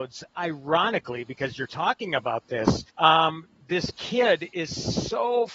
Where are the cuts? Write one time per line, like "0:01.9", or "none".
0:02.9